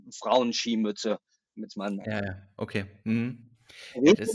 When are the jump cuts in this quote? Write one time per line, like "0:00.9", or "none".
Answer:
none